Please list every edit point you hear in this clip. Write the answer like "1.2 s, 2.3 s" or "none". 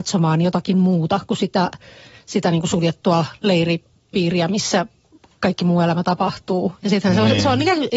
none